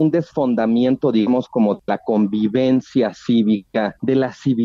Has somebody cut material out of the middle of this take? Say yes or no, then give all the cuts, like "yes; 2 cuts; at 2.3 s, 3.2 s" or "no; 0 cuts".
no; 0 cuts